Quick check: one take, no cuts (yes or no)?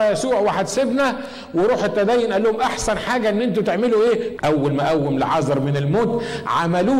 no